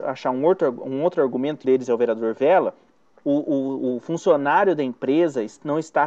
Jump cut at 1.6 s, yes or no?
yes